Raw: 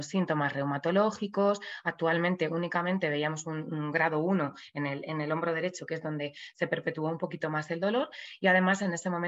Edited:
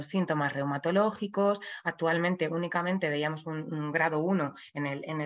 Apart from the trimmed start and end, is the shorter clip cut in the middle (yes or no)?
no